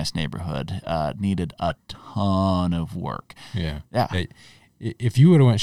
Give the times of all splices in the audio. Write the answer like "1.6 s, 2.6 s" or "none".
3.8 s